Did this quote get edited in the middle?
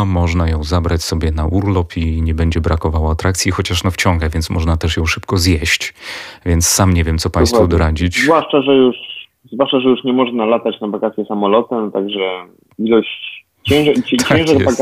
no; 0 cuts

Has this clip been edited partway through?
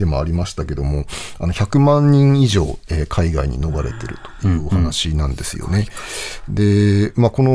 no; 0 cuts

